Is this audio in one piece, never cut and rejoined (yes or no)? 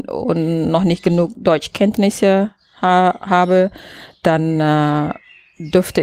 yes